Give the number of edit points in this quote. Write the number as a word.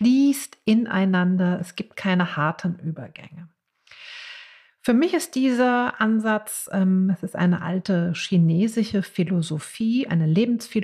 zero